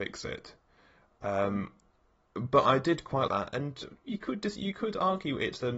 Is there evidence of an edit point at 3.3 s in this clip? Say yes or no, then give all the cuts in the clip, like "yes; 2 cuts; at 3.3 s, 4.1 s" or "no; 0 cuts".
yes; 1 cut; at 3.3 s